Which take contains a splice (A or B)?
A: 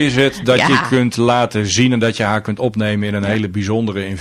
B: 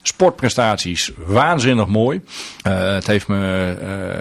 B